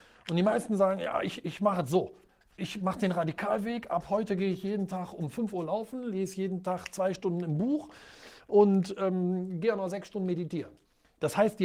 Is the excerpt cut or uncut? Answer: uncut